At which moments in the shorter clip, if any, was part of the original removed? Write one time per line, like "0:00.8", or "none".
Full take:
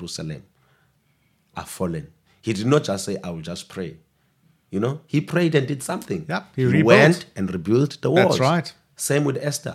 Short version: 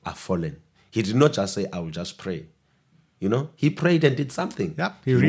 none